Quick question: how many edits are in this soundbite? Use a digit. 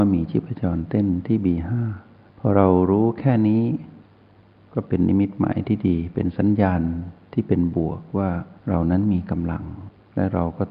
1